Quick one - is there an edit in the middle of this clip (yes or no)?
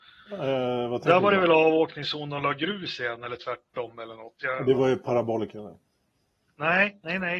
no